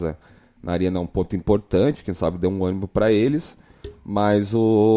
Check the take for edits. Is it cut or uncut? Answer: uncut